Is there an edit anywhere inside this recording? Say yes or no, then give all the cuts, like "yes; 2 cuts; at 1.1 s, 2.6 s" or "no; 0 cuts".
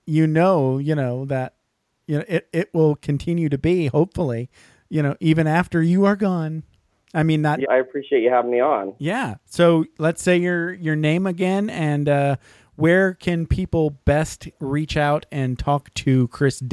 yes; 1 cut; at 7.6 s